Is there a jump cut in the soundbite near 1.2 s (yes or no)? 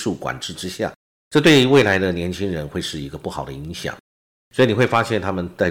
yes